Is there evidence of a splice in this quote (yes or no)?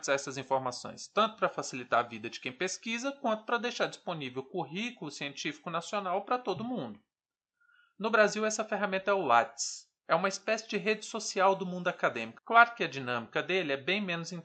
yes